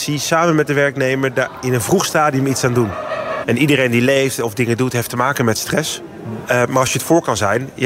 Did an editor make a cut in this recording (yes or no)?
yes